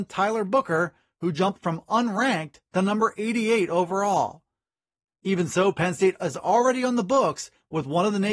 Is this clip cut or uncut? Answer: cut